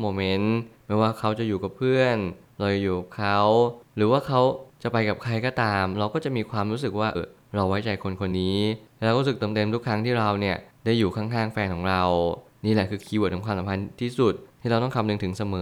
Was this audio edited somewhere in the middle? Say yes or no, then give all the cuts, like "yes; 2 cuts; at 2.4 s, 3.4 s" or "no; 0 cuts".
yes; 2 cuts; at 7.1 s, 8.3 s